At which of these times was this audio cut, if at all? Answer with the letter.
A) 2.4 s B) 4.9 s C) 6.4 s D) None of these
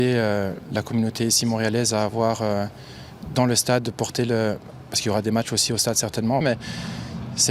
C